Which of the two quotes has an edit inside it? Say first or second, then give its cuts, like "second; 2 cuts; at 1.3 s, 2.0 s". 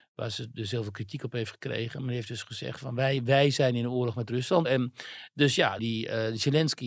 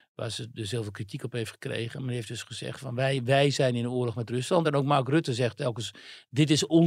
first; 2 cuts; at 4.6 s, 5.8 s